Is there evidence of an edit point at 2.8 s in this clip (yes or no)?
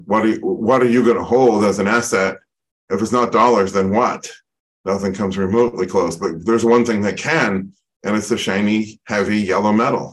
no